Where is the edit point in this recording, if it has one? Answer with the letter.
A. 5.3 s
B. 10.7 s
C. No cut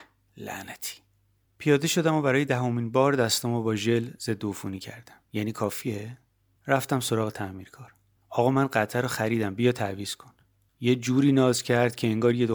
A